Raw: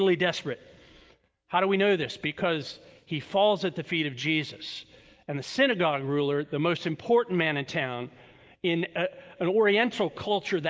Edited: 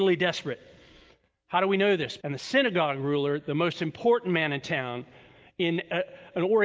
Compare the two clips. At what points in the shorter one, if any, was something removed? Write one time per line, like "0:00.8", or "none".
0:02.2